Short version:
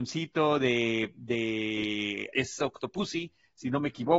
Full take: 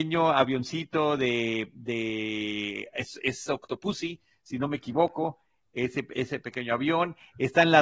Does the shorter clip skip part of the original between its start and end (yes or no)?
yes